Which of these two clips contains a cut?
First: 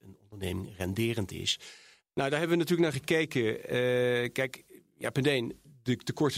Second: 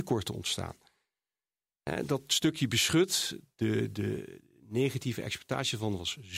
first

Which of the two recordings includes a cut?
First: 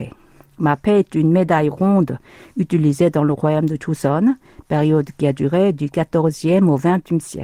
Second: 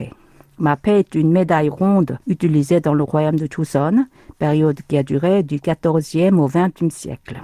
second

